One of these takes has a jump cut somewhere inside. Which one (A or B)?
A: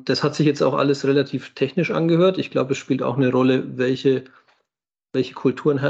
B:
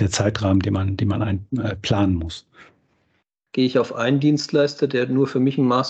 B